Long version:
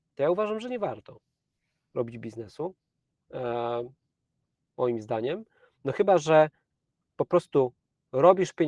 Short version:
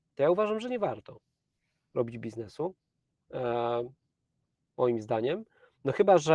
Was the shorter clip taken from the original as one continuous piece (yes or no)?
yes